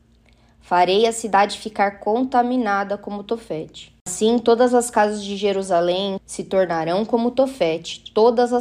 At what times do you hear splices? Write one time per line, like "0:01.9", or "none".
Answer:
0:06.2

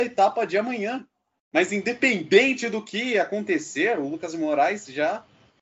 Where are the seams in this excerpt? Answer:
none

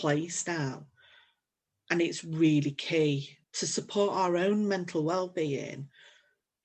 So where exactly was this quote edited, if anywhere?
0:03.4

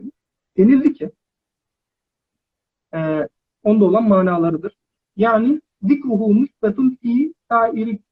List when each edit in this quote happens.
0:03.5
0:05.0

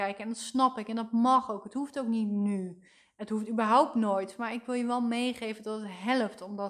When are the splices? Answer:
none

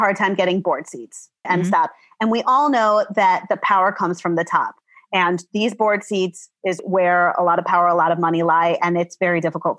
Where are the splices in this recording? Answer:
0:01.4
0:06.8

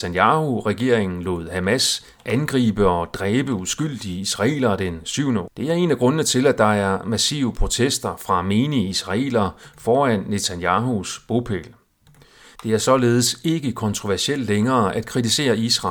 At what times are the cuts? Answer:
0:05.5
0:12.6

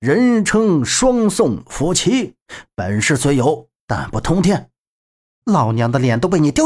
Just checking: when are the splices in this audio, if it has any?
0:05.4

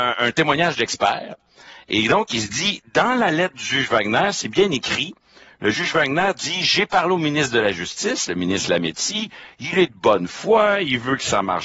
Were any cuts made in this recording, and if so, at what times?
none

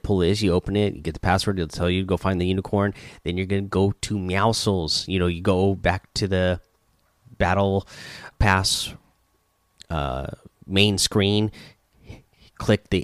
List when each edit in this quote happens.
0:08.3

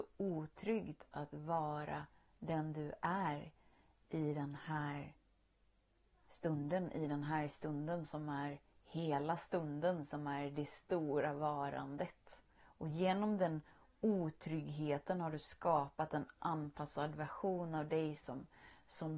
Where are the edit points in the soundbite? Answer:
0:12.5

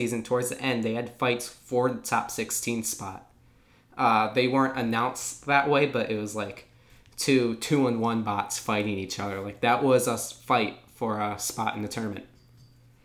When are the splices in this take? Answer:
none

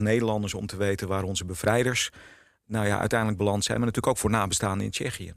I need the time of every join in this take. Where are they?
none

